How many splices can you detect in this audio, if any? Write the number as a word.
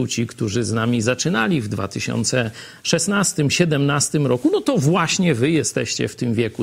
zero